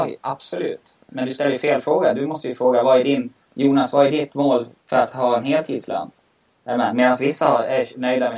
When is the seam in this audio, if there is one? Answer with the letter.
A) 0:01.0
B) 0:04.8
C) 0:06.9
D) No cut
B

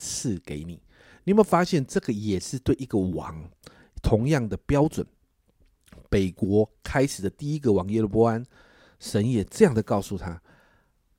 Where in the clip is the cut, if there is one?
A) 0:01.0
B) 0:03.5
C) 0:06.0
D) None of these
D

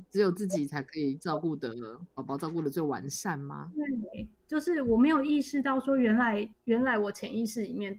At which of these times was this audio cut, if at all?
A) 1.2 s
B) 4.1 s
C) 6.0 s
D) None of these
D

